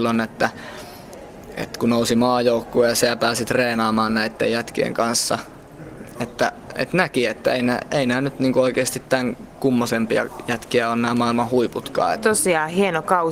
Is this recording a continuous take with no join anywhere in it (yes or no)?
no